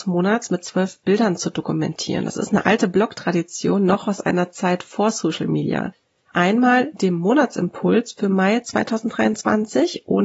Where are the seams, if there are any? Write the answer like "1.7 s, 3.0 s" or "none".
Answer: 6.3 s